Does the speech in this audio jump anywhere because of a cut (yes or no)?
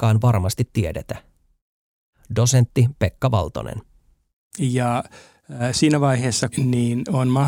yes